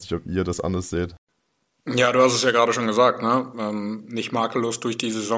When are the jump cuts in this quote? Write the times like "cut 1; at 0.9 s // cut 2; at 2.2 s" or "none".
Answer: none